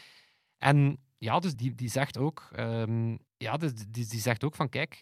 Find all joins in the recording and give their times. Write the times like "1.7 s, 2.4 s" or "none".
1.5 s, 3.3 s